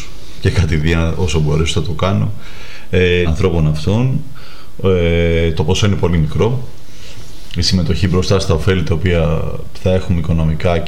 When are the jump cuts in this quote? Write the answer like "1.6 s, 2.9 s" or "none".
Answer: 3.2 s